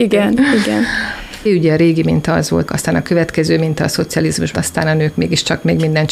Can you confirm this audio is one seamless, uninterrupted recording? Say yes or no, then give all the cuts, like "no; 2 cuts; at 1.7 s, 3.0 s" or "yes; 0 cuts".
no; 3 cuts; at 1.5 s, 2.7 s, 4.5 s